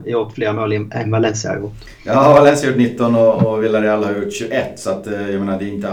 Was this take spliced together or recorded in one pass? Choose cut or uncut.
uncut